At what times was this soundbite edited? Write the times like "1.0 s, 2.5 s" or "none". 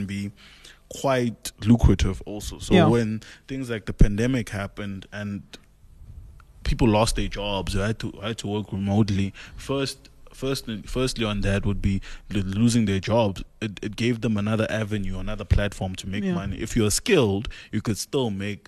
none